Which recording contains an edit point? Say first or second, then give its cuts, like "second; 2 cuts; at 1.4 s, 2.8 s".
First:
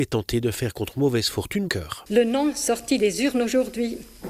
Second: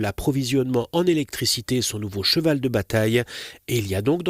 first; 1 cut; at 1.7 s